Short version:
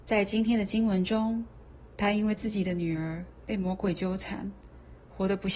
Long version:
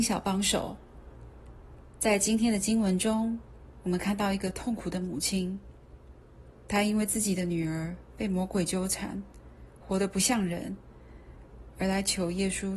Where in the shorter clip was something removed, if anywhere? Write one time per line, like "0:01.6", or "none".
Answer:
0:01.9

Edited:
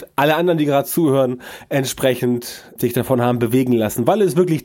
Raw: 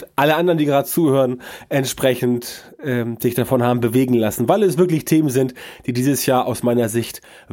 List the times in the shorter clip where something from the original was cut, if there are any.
0:02.8

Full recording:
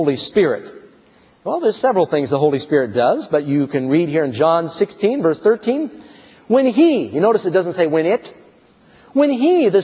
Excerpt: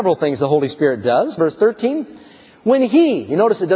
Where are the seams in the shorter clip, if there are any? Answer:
0:01.4

